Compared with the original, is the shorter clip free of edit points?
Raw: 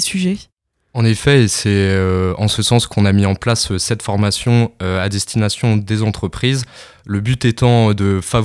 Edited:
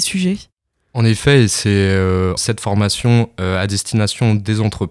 no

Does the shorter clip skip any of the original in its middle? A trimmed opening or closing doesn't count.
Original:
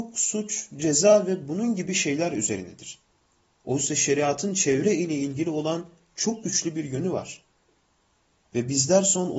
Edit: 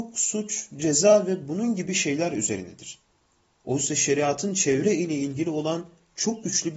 no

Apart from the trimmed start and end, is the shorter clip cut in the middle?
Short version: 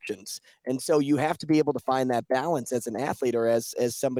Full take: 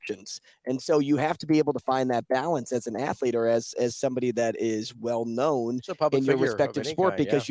no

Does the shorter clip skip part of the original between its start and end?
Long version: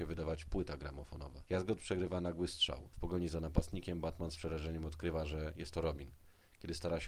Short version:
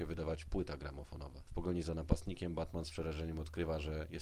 yes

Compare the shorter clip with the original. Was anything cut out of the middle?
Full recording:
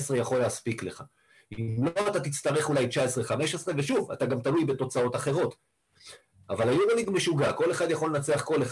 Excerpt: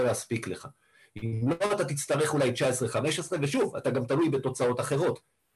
no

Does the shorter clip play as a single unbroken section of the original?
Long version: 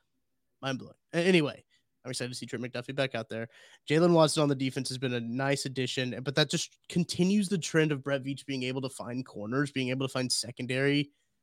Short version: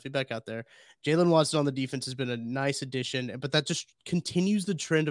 yes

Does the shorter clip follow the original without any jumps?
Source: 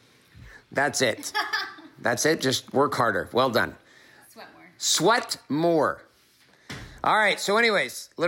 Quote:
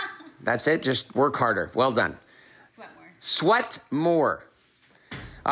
yes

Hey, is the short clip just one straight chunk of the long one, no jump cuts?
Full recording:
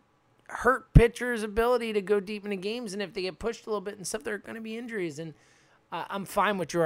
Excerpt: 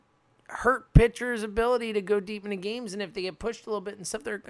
yes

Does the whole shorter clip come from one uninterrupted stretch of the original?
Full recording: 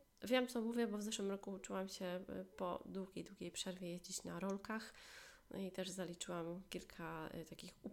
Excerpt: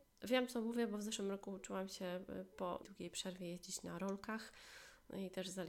no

